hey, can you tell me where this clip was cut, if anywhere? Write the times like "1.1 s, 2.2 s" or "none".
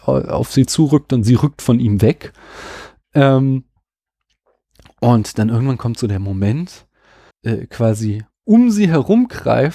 7.3 s